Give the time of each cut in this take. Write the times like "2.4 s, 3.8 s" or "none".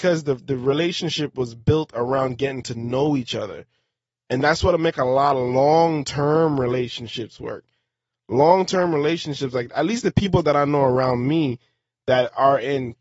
none